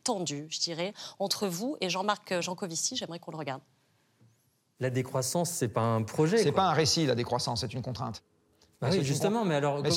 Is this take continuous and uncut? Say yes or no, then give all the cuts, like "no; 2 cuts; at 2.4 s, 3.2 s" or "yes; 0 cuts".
yes; 0 cuts